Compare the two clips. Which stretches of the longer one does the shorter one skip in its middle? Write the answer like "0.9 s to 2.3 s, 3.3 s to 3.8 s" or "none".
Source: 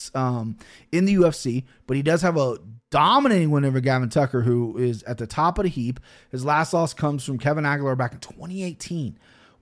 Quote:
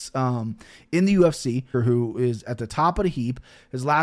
1.7 s to 4.3 s